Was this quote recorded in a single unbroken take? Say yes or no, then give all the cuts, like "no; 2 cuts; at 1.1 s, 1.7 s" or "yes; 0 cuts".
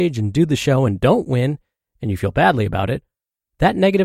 yes; 0 cuts